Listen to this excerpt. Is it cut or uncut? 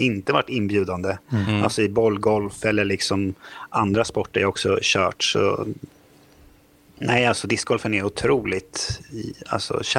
uncut